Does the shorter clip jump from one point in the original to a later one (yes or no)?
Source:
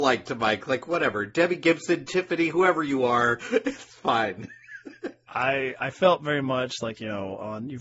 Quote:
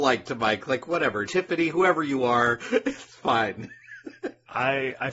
yes